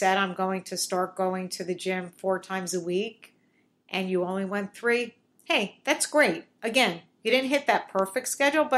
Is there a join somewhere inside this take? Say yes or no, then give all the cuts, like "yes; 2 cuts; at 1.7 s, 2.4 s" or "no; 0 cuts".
no; 0 cuts